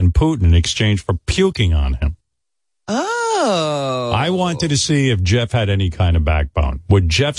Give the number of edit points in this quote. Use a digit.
0